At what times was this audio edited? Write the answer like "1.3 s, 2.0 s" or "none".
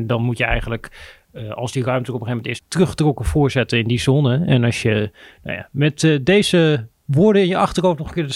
2.6 s